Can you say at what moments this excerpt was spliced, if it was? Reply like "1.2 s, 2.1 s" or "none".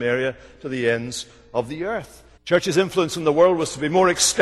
2.4 s